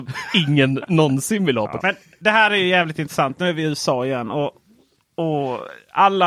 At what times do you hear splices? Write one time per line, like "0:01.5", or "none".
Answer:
0:01.8

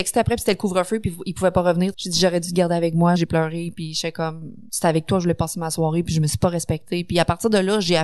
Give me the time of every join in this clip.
0:01.9
0:03.2

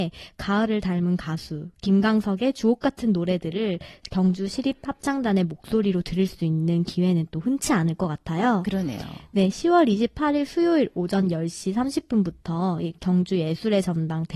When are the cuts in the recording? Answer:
none

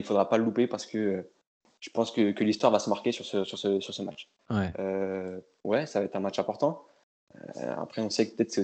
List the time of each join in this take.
0:04.4

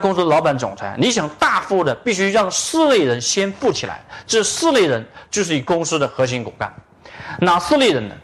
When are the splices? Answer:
none

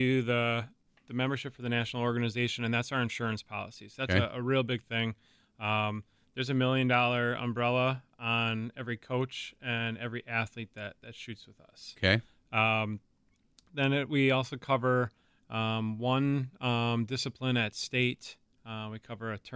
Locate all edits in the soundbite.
none

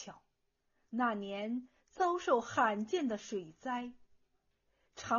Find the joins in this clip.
none

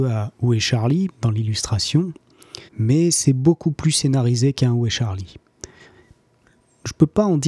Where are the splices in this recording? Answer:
0:01.1
0:02.7

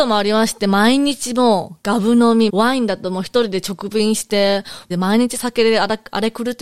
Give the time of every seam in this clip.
0:02.5
0:04.9

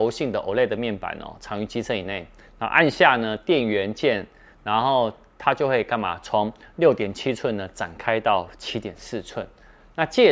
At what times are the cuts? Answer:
none

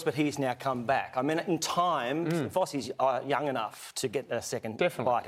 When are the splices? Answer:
none

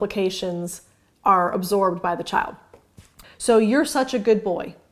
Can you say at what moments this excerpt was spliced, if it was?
0:03.2

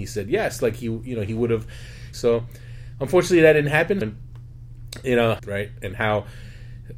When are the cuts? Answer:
0:02.1
0:04.0
0:05.4

